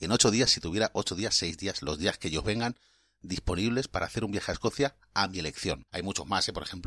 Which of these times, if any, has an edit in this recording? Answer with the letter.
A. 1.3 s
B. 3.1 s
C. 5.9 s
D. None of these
C